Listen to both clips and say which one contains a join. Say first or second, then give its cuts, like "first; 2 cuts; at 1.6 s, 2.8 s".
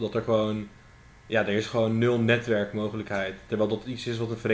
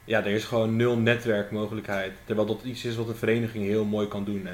first; 1 cut; at 1.2 s